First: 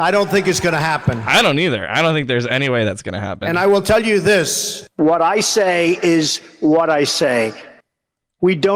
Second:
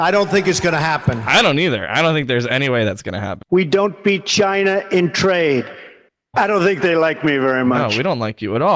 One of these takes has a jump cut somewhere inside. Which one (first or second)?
second